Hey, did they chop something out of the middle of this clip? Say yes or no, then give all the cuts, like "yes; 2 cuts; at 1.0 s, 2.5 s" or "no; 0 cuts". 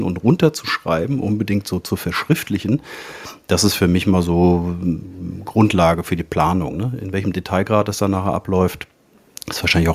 no; 0 cuts